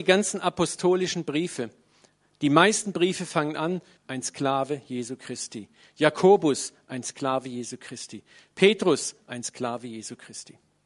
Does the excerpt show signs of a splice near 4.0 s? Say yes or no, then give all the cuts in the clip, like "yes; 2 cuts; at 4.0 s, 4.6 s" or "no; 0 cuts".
yes; 1 cut; at 4.0 s